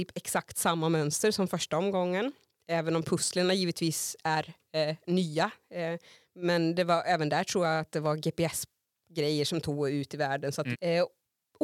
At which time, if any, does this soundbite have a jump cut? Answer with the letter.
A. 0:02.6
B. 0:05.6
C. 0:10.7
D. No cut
C